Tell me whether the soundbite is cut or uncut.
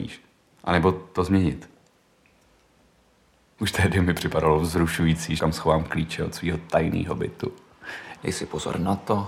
cut